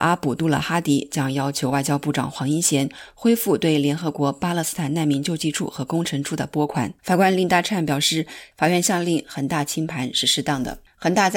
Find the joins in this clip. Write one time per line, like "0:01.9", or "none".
0:07.0
0:08.5

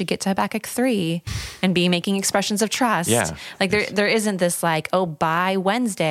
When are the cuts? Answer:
none

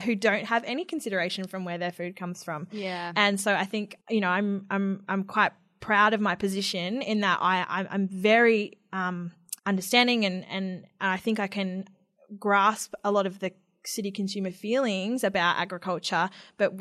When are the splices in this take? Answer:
0:04.0
0:09.6

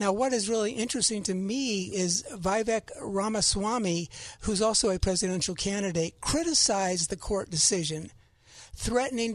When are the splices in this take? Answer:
0:01.9

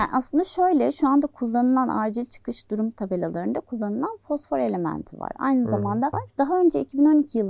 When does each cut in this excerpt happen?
0:06.1

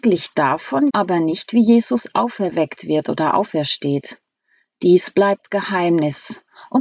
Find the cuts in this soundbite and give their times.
0:00.9

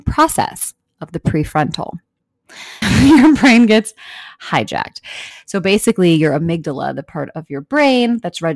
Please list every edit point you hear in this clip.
0:02.8
0:05.3

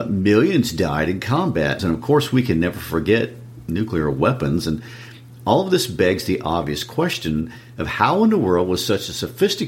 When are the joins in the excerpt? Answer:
0:01.8

